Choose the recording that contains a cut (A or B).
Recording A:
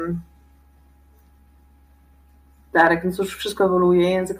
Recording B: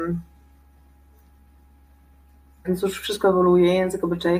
B